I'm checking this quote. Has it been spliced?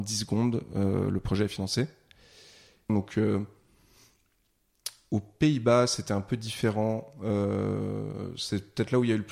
yes; 1 cut; at 2.9 s

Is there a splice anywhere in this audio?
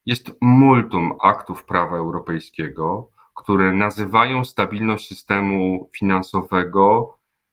no; 0 cuts

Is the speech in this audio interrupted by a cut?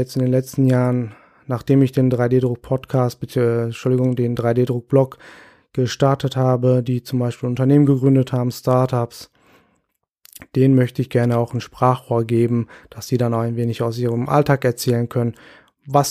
no; 0 cuts

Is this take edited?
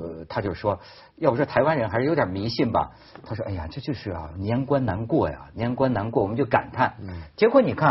no; 0 cuts

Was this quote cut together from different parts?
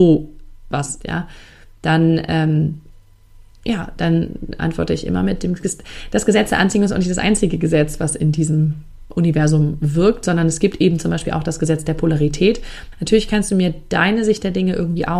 yes; 2 cuts; at 1.0 s, 12.9 s

